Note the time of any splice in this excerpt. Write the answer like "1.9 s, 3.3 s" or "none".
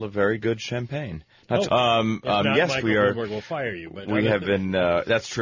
1.6 s